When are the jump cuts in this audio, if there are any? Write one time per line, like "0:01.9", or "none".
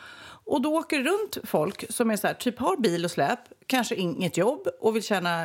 none